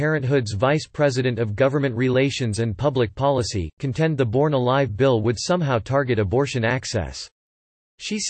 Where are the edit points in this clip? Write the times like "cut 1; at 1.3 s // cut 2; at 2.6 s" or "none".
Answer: none